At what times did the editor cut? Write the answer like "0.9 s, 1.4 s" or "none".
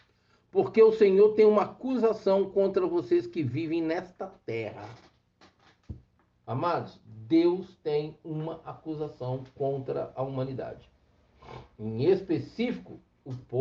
11.7 s